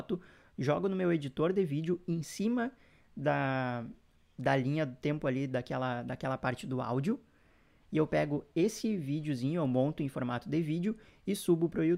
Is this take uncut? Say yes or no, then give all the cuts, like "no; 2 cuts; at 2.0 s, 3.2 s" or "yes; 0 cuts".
no; 1 cut; at 7.8 s